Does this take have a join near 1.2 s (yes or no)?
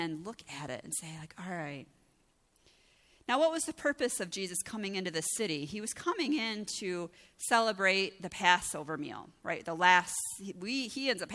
no